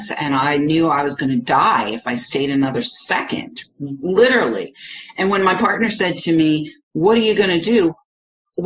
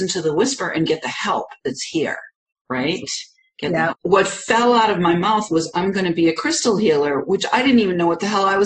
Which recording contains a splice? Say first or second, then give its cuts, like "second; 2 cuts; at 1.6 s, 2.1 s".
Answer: second; 1 cut; at 3.9 s